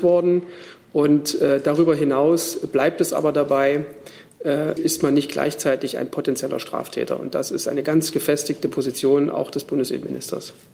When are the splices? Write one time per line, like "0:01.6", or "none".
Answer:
0:04.8